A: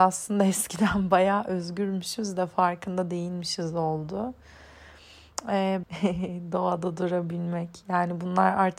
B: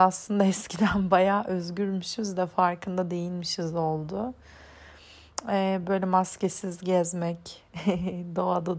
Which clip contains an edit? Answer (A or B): A